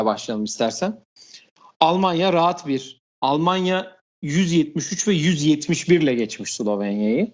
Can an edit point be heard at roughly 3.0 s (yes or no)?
yes